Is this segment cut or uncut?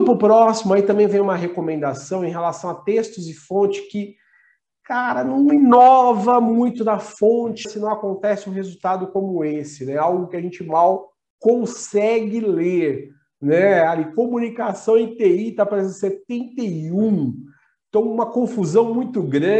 cut